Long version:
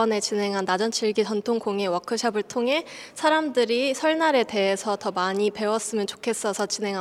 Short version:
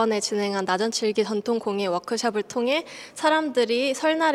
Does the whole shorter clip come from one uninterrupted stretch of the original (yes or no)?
yes